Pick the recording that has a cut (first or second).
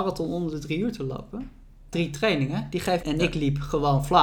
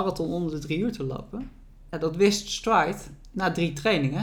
first